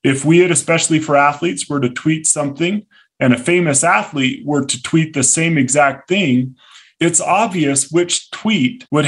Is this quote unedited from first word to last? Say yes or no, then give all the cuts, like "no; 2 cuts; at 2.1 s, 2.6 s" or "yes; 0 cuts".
yes; 0 cuts